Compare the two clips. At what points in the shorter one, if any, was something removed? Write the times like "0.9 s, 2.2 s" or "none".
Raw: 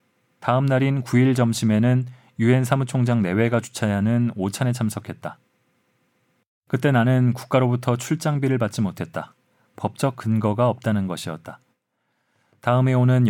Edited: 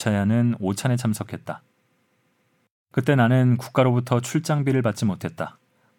none